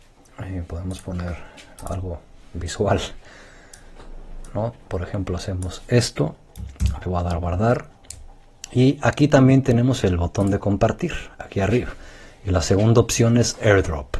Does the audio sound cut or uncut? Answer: uncut